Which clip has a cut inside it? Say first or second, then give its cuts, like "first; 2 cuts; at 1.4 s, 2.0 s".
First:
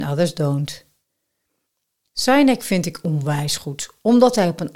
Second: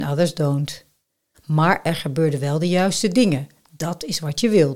second; 1 cut; at 1.3 s